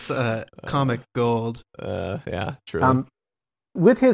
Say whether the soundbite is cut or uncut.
uncut